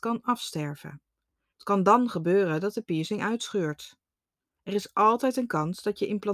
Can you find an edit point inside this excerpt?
yes; 2 cuts; at 1.5 s, 4.6 s

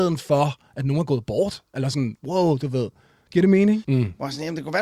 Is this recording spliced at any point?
yes; 1 cut; at 3.8 s

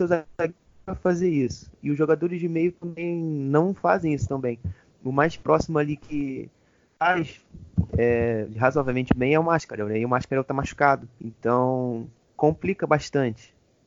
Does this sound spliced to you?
no; 0 cuts

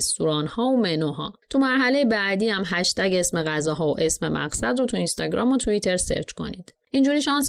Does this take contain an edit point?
yes; 1 cut; at 1.4 s

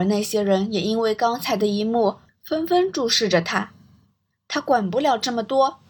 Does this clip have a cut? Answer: no; 0 cuts

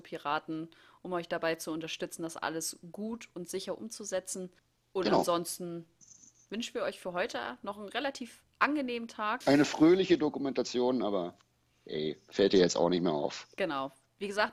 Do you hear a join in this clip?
yes; 1 cut; at 9.4 s

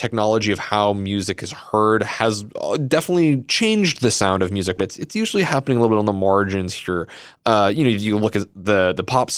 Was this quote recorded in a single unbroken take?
no; 1 cut; at 4.8 s

